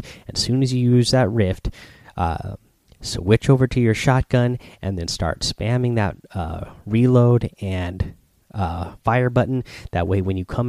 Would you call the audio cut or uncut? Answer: uncut